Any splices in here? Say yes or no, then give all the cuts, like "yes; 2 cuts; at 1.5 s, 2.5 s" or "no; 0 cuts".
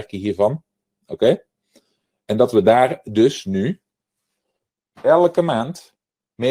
no; 0 cuts